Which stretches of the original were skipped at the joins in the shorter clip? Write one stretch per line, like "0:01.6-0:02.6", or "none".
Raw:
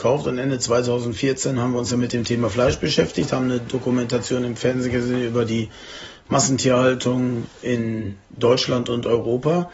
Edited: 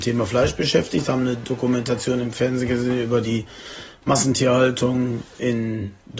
none